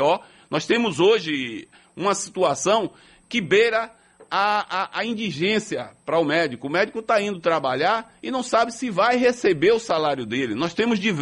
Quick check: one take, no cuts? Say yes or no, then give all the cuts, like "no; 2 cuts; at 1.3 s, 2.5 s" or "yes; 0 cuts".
yes; 0 cuts